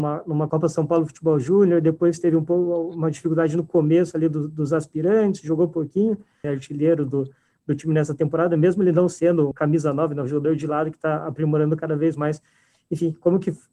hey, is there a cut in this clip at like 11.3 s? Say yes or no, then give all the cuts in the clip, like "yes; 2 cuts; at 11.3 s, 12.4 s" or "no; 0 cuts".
no; 2 cuts; at 6.4 s, 9.5 s